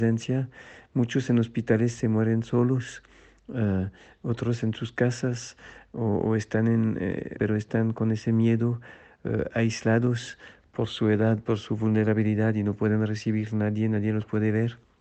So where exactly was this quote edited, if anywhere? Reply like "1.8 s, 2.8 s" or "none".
7.4 s

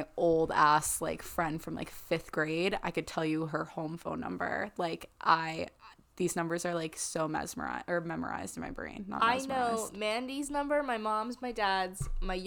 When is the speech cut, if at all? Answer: none

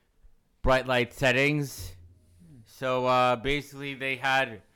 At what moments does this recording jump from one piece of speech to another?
none

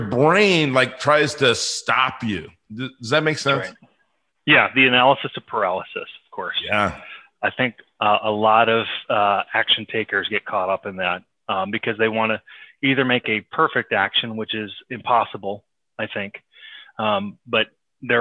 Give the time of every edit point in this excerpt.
none

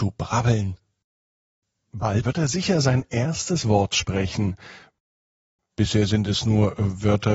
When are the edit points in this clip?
2.2 s

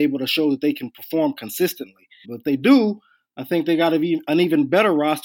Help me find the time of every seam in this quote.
2.2 s

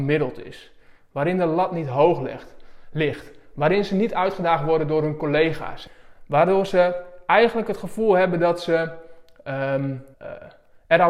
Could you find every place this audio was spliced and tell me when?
10.1 s

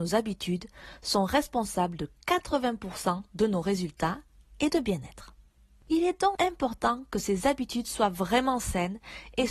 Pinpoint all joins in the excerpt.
6.4 s

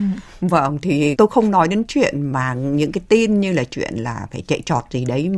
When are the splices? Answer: 1.1 s

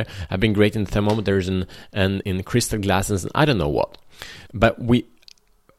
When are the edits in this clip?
2.2 s, 4.5 s

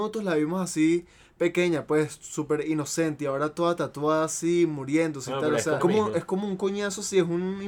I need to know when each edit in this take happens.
5.8 s

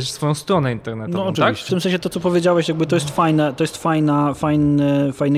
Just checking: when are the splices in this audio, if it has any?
1.7 s

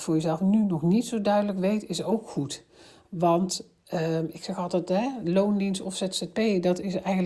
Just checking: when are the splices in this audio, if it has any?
none

